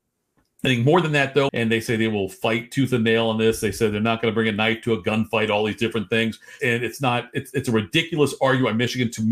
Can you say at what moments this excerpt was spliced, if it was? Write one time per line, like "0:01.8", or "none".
0:01.5
0:06.6